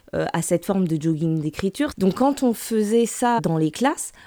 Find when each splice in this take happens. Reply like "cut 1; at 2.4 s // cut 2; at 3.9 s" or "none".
cut 1; at 1.9 s // cut 2; at 3.4 s